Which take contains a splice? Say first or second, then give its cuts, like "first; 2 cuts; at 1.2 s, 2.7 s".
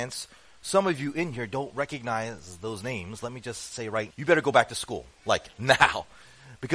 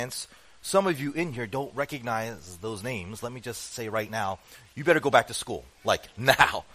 first; 1 cut; at 4.1 s